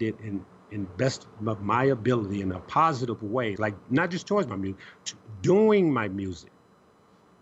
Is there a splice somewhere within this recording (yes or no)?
yes